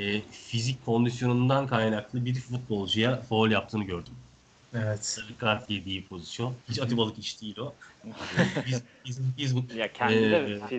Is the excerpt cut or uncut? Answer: cut